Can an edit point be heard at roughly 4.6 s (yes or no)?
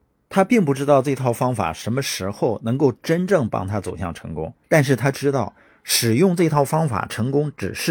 yes